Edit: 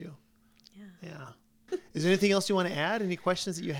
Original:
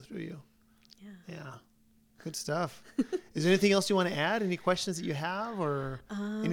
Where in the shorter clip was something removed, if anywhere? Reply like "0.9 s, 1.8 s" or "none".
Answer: 1.7 s